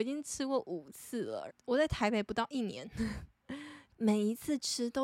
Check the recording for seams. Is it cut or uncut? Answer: cut